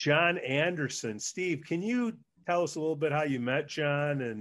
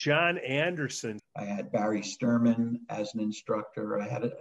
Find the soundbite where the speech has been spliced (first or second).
second